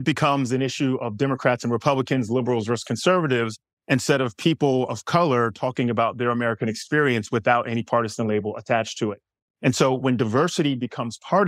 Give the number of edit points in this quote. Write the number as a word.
zero